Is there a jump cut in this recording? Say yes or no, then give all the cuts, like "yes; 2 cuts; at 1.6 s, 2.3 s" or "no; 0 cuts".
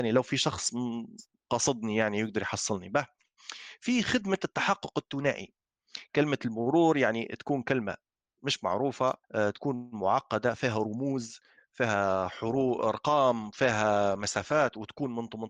yes; 1 cut; at 9.2 s